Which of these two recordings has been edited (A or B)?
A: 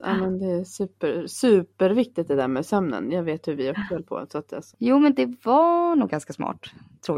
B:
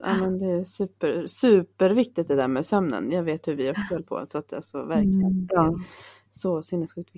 A